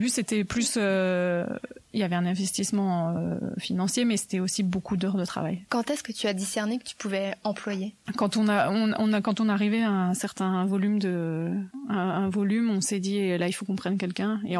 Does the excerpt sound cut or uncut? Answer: cut